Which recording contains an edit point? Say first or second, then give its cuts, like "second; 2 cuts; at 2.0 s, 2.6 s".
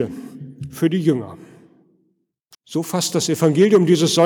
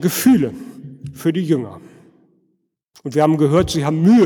first; 1 cut; at 2.5 s